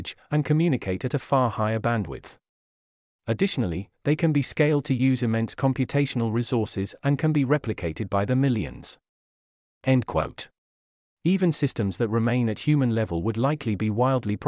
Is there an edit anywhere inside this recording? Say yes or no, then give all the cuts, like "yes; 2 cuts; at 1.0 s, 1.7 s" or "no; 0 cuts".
no; 0 cuts